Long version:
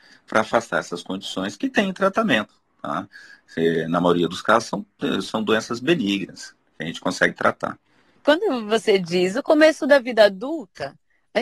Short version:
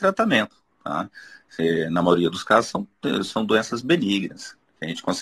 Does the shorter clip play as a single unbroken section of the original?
yes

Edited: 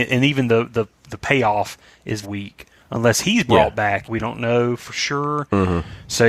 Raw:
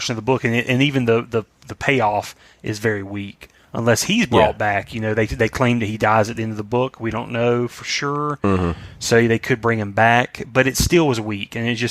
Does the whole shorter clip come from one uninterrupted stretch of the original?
no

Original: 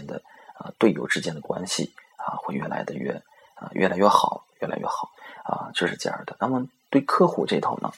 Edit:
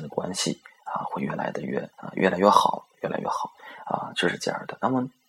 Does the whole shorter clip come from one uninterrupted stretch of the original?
no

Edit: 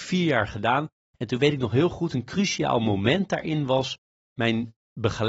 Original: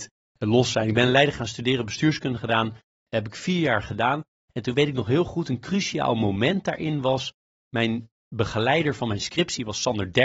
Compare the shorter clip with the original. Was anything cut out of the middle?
no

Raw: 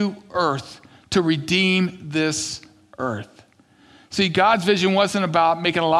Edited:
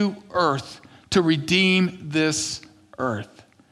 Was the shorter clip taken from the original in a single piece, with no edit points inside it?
yes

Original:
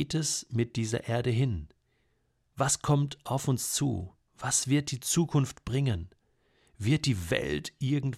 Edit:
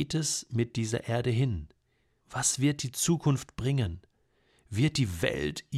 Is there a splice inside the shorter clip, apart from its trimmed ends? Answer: yes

